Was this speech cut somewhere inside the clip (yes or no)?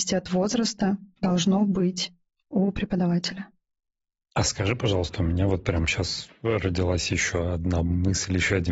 no